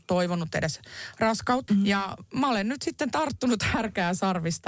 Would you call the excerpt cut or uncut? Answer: cut